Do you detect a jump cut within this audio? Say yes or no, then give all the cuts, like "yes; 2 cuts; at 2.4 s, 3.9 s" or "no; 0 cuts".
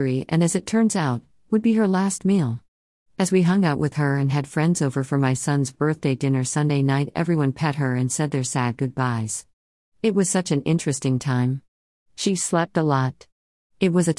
no; 0 cuts